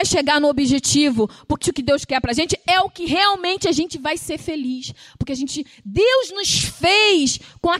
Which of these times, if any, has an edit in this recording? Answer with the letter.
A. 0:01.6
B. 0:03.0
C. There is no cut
A